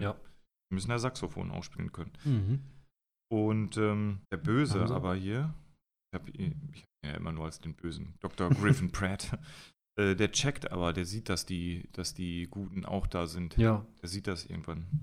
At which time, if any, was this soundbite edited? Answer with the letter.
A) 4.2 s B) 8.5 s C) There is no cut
A